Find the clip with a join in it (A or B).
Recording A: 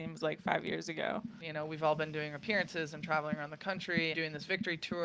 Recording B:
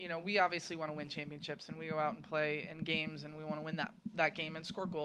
A